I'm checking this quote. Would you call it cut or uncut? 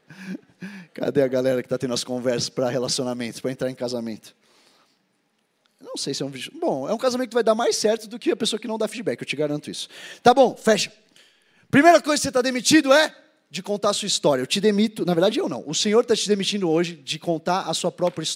uncut